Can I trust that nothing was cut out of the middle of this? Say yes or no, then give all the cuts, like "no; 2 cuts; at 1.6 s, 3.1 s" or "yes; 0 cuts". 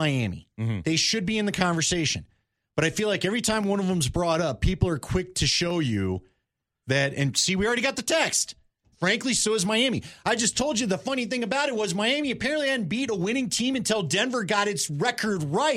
no; 1 cut; at 8.9 s